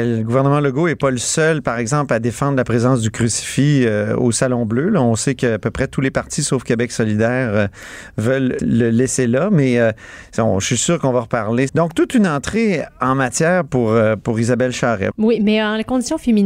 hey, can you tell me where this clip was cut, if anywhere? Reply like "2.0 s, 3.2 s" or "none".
8.6 s, 11.7 s, 15.1 s